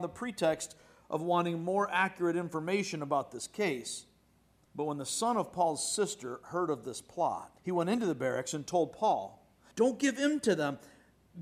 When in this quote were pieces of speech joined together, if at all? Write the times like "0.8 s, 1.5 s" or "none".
4.7 s, 7.6 s, 9.7 s